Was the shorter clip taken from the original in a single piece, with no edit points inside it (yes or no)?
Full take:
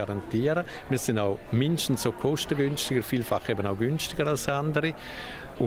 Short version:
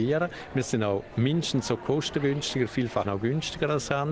no